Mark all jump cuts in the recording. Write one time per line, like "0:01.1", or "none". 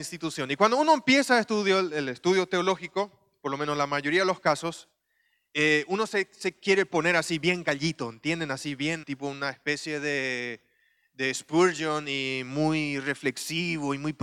0:09.0

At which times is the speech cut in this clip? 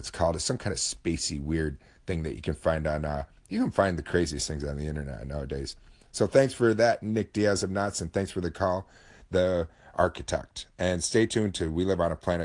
none

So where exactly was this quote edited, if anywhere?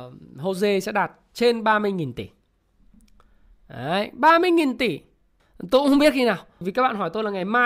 0:05.4
0:06.6

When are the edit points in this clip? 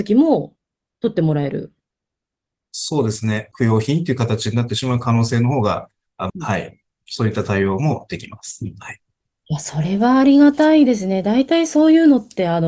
0:03.5
0:06.3

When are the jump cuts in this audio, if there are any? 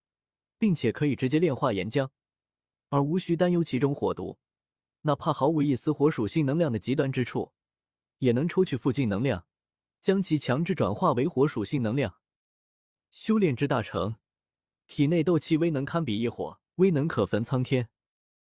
0:16.7

